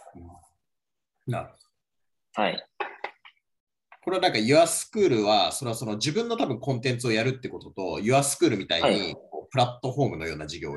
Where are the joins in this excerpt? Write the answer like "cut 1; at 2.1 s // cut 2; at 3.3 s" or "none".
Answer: none